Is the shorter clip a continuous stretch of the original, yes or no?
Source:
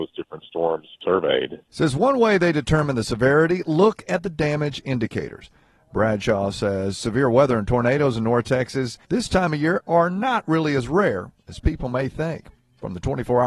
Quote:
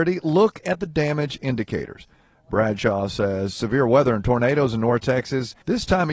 yes